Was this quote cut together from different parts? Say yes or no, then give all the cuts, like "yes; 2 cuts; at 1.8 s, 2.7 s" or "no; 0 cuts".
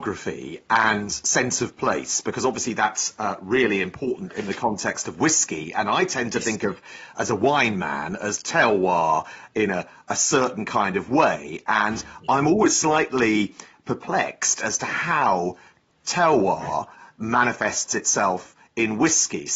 no; 0 cuts